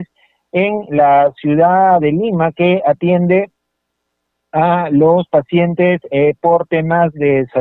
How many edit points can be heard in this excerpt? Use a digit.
0